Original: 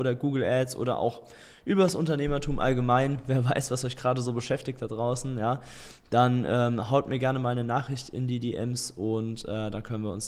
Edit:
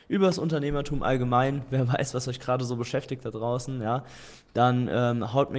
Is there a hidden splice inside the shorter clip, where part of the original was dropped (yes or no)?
no